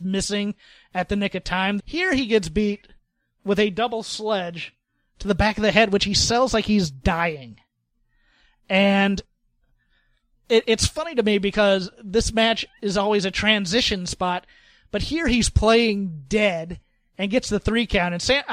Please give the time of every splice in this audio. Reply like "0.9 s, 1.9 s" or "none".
1.8 s